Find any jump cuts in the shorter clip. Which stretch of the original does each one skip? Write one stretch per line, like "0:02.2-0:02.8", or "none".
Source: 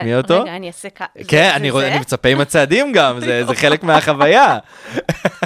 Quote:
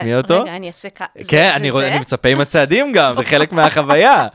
0:03.1-0:03.5